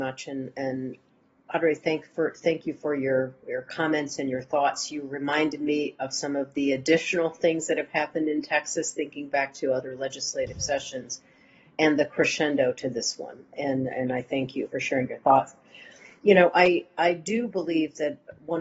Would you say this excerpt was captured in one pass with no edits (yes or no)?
no